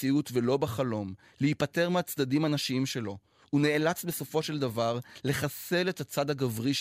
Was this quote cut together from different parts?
no; 0 cuts

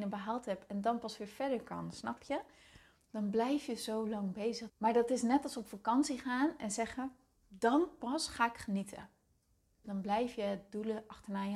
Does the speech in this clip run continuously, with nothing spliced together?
no; 3 cuts; at 4.7 s, 7.4 s, 9.8 s

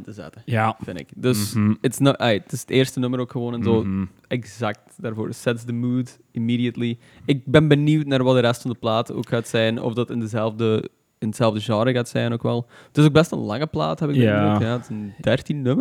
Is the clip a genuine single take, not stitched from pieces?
yes; 0 cuts

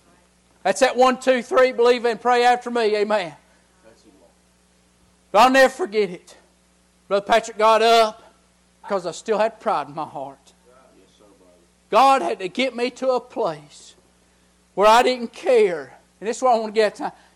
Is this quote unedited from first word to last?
no; 1 cut; at 8.8 s

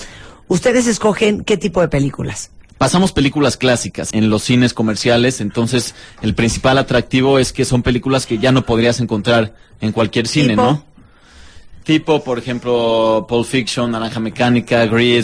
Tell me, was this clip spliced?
yes; 2 cuts; at 2.7 s, 4.1 s

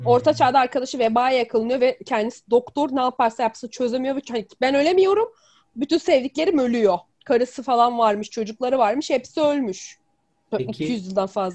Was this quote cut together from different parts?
no; 0 cuts

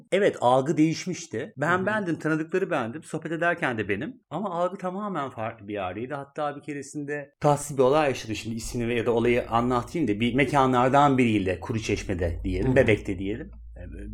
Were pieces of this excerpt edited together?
no; 0 cuts

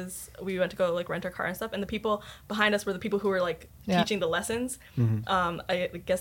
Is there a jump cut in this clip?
no; 0 cuts

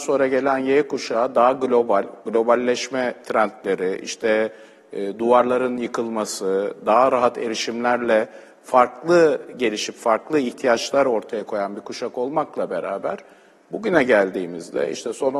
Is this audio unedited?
yes; 0 cuts

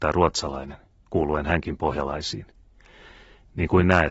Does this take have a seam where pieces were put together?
no; 0 cuts

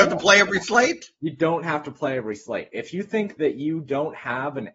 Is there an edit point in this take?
no; 0 cuts

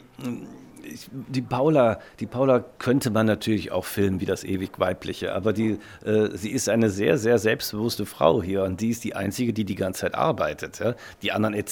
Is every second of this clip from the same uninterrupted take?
yes; 0 cuts

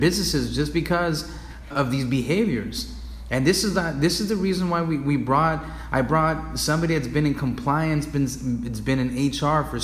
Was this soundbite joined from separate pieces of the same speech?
yes; 1 cut; at 1.7 s

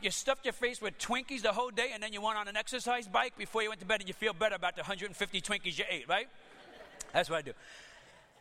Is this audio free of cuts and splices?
yes; 0 cuts

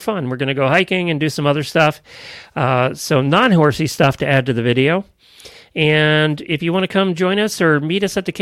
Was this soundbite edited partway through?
no; 0 cuts

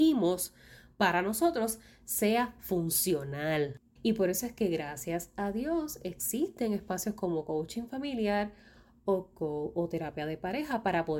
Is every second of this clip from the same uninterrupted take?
no; 1 cut; at 4.0 s

